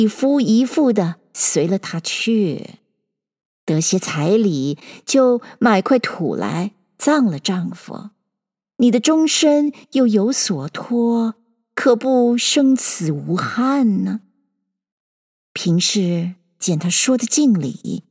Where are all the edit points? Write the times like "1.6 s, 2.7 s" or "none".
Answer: none